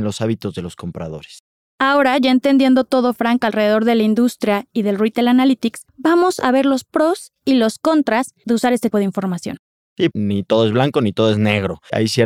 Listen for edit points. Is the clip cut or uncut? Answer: cut